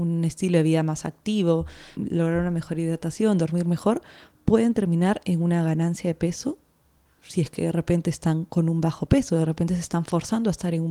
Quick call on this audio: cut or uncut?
cut